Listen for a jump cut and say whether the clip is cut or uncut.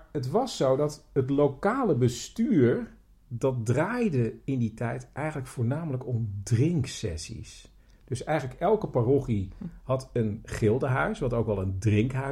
uncut